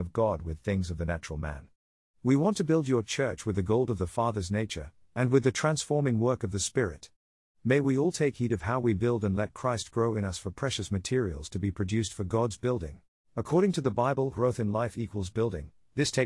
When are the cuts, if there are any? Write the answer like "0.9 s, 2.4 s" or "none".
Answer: 5.0 s, 13.2 s